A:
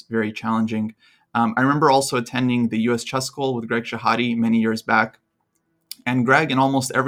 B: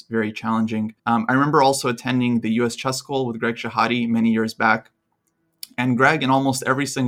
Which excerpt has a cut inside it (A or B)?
B